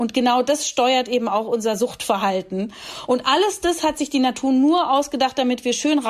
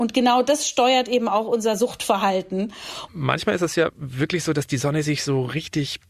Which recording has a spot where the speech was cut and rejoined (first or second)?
second